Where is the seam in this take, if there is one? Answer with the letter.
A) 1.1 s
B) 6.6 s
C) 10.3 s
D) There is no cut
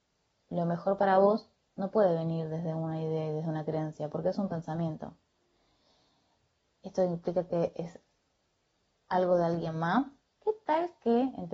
C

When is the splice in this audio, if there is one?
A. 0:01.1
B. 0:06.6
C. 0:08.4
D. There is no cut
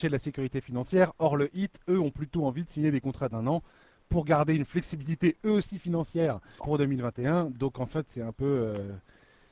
B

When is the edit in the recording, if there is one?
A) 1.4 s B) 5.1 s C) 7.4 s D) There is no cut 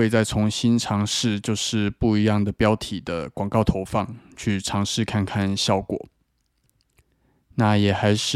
D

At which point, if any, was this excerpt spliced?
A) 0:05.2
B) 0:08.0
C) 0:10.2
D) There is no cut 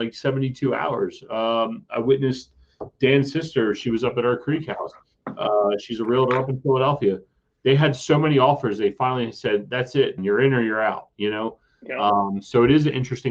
C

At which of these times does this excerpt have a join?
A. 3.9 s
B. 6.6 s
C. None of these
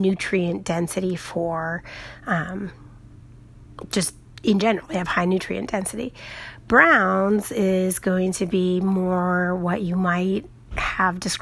C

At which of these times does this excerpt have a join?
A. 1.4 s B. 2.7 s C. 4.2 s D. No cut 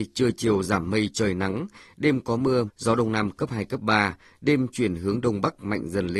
B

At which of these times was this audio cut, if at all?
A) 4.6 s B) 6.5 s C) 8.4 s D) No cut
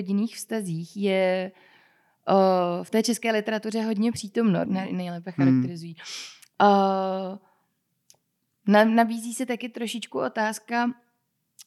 A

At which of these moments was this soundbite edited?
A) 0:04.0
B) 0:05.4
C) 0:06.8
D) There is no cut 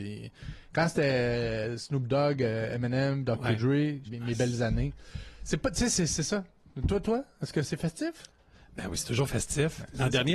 A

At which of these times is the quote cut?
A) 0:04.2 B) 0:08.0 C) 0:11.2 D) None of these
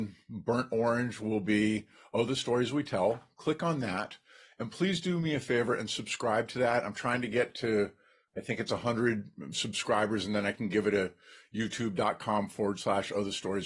D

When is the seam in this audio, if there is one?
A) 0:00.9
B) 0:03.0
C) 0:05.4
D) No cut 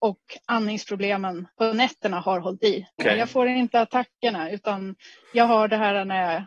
B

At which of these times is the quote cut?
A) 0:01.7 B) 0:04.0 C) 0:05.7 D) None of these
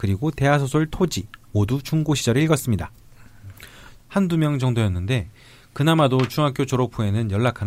B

